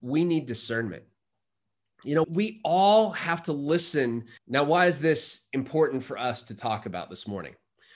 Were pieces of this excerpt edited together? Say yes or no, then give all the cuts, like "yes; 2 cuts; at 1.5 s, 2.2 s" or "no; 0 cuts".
yes; 2 cuts; at 2.2 s, 4.4 s